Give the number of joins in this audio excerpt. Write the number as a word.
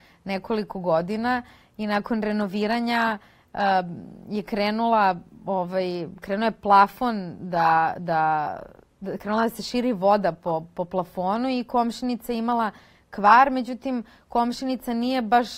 zero